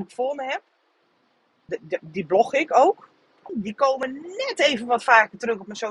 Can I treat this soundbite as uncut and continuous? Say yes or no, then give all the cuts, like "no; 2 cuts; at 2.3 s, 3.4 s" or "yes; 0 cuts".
no; 2 cuts; at 1.7 s, 3.5 s